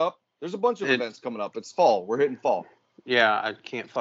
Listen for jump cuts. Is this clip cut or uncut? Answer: uncut